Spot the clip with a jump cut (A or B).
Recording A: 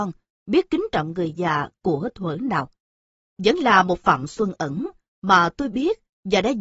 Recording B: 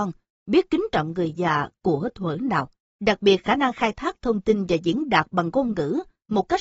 B